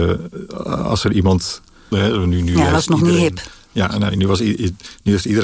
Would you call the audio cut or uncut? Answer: cut